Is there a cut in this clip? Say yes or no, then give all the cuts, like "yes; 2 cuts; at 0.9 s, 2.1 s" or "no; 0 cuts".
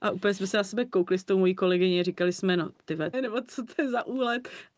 yes; 1 cut; at 3.1 s